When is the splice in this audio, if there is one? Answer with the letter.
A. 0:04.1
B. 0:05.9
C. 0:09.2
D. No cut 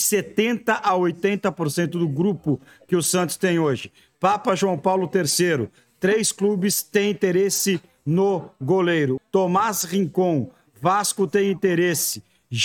C